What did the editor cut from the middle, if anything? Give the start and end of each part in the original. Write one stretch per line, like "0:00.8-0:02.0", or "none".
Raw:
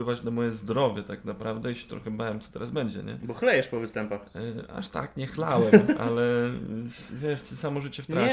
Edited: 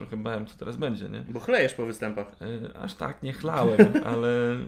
none